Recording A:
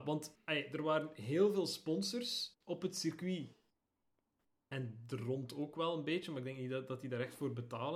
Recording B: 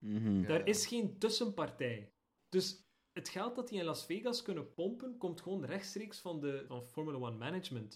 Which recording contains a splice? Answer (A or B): B